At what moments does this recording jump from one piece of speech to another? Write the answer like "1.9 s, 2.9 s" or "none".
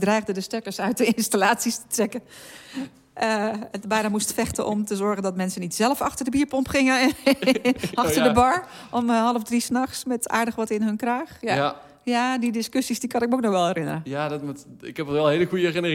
3.8 s